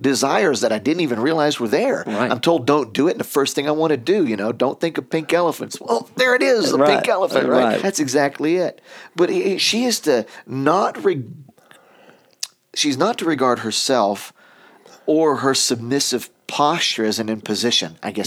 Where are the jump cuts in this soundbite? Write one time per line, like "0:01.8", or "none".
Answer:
0:07.8